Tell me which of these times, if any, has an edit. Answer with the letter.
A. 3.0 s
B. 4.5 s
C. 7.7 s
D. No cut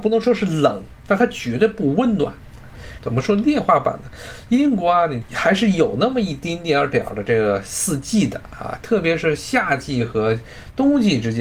A